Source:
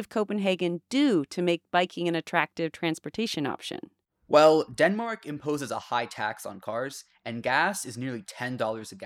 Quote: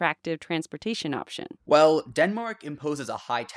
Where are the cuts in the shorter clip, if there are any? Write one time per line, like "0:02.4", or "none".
0:01.6